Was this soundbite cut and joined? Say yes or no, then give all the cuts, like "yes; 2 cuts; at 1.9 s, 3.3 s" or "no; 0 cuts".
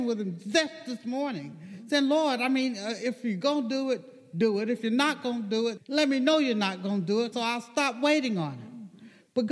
yes; 2 cuts; at 5.8 s, 7.3 s